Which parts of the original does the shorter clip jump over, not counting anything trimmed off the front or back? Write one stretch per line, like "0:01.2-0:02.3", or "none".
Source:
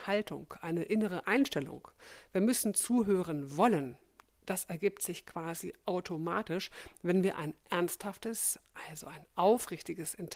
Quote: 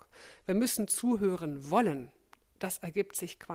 none